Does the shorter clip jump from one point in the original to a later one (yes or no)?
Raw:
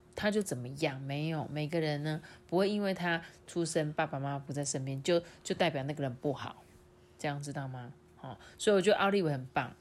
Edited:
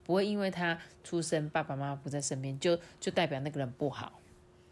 no